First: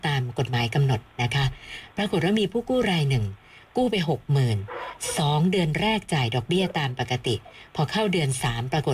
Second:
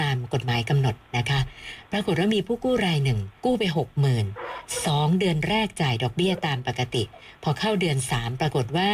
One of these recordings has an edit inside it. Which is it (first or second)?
second